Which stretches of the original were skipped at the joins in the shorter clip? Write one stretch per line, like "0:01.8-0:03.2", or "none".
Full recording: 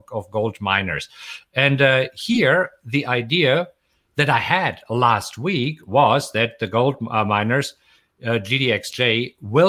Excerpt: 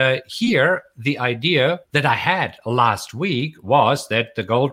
0:03.7-0:04.1